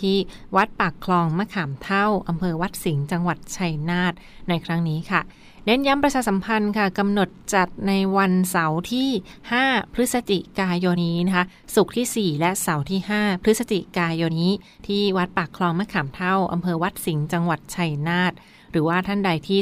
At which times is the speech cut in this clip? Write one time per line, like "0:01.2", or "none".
0:11.0
0:14.3

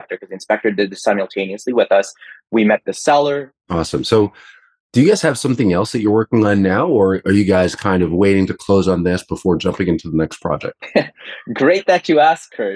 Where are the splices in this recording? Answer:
0:03.6

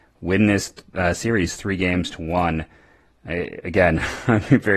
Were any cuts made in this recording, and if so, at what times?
none

